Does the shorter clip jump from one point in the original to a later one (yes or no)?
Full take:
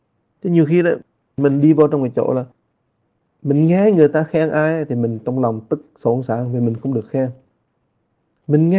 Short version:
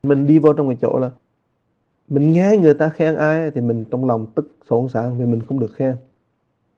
no